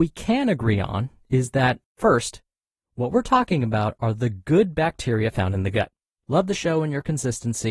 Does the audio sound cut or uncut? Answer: cut